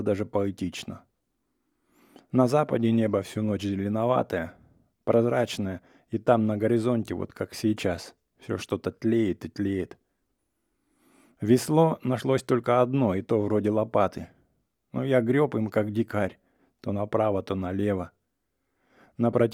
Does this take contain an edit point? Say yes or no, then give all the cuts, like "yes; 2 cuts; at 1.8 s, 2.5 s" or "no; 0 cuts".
no; 0 cuts